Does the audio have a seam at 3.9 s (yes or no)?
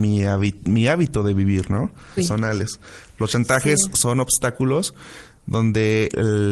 no